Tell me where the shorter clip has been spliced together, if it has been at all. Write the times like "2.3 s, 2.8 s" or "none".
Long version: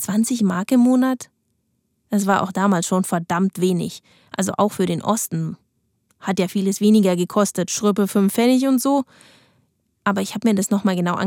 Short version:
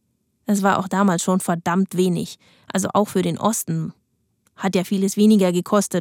none